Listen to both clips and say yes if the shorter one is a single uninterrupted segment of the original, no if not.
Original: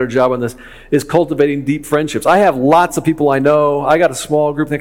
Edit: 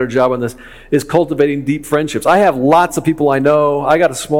yes